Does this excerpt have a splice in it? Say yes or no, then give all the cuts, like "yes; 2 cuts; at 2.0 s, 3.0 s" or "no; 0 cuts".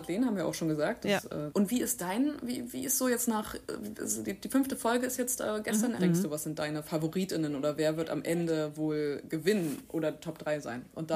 yes; 2 cuts; at 1.5 s, 6.0 s